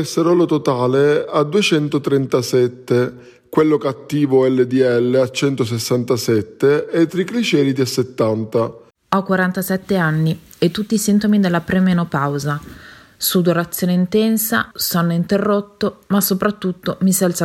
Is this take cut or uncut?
cut